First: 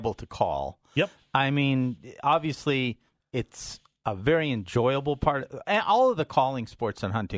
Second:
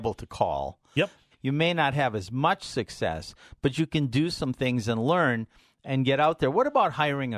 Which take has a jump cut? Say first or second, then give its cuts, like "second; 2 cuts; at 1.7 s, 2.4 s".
second; 1 cut; at 1.3 s